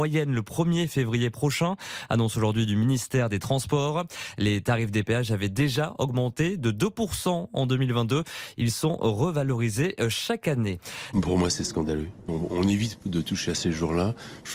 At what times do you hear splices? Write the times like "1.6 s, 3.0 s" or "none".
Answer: 11.1 s, 12.3 s